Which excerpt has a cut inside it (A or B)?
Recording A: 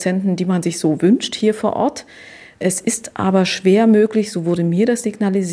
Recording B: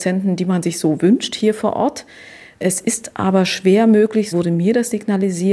B